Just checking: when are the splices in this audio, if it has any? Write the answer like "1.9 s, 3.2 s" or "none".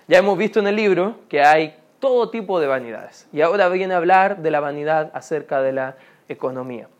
none